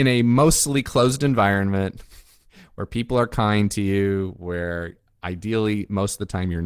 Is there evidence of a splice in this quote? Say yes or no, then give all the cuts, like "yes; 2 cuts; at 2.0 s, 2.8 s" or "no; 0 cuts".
no; 0 cuts